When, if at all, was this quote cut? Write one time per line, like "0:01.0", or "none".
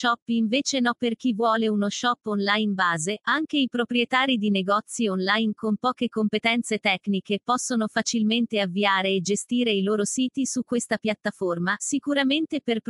0:11.8

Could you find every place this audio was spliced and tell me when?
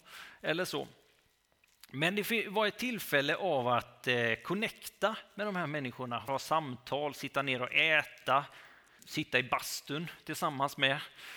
0:06.3
0:09.0

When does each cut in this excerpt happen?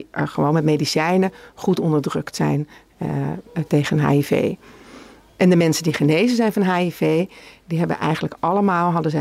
none

